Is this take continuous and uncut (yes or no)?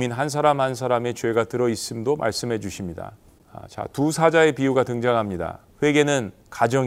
no